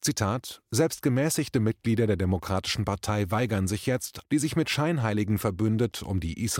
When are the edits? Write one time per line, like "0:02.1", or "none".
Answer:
0:04.2

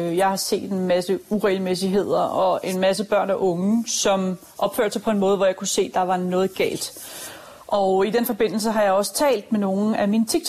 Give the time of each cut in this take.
none

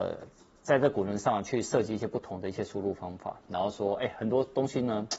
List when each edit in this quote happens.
0:03.5

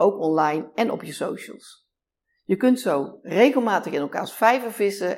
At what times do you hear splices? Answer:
none

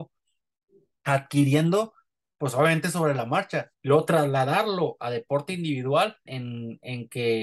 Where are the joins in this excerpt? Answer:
0:03.7
0:06.3

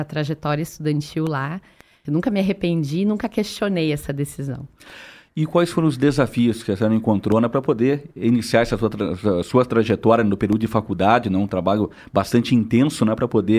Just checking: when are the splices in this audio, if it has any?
0:02.0

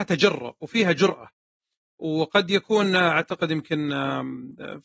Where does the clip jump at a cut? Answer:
none

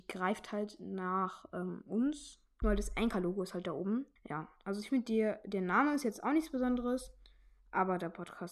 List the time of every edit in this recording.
0:02.6
0:04.2

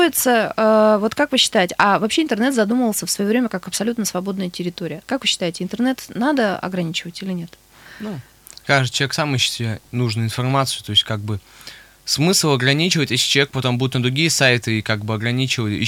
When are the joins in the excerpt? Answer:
none

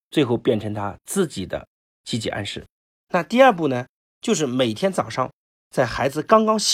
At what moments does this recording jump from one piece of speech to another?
0:03.0

